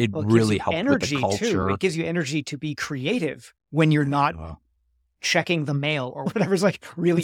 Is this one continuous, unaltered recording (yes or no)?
yes